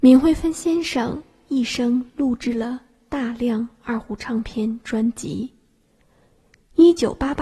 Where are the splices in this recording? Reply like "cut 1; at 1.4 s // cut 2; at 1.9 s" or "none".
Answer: none